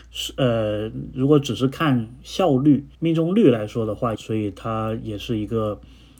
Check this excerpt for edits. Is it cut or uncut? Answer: cut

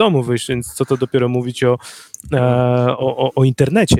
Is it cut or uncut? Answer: uncut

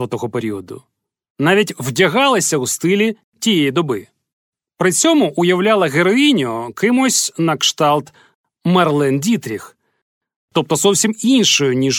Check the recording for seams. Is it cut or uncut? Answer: uncut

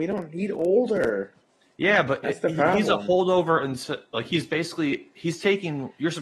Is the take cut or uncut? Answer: uncut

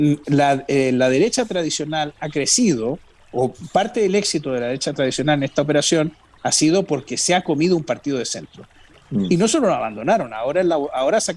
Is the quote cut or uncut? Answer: cut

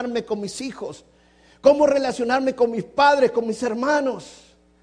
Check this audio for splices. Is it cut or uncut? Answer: uncut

